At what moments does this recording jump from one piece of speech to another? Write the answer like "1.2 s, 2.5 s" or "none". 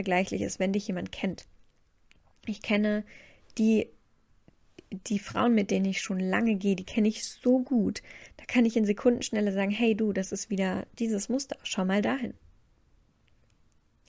none